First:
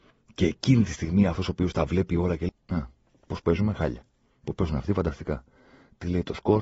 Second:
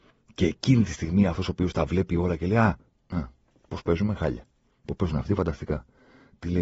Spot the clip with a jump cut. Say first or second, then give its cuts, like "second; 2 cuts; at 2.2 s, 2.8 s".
first; 1 cut; at 2.5 s